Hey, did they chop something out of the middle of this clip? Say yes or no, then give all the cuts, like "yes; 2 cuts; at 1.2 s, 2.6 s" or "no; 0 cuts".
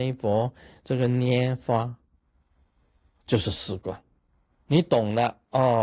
yes; 1 cut; at 4.5 s